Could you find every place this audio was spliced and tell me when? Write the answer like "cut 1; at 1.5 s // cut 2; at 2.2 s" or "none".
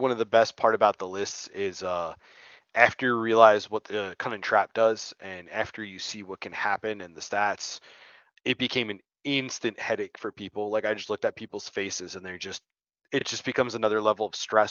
none